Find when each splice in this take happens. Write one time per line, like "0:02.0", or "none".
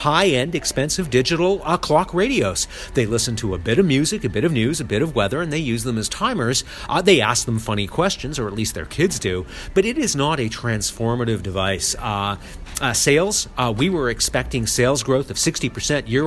none